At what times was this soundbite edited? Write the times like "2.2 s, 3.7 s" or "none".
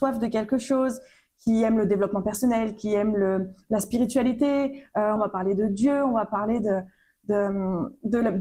5.2 s